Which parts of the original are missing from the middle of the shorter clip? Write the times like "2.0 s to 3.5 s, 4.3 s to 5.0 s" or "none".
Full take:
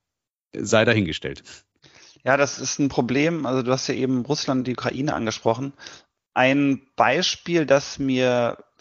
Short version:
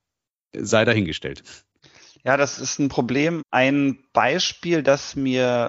3.4 s to 6.2 s